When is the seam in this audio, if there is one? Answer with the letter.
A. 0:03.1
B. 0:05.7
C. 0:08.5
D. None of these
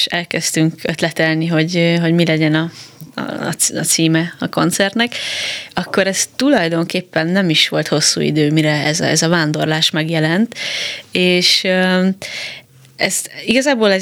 D